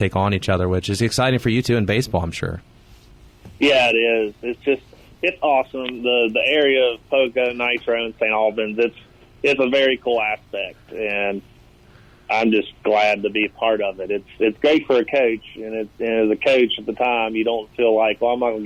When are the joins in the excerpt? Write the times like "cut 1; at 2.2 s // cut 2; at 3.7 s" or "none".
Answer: none